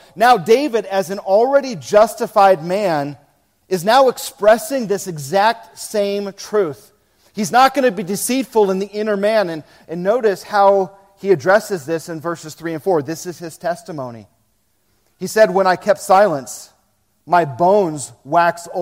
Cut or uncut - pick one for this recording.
uncut